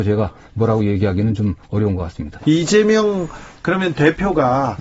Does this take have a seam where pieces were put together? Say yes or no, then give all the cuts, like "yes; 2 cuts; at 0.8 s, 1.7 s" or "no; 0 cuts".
yes; 1 cut; at 2.4 s